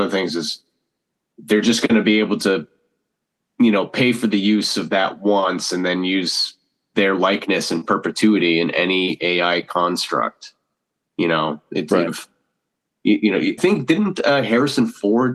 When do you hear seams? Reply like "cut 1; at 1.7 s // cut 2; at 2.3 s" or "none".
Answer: cut 1; at 12.1 s // cut 2; at 13.6 s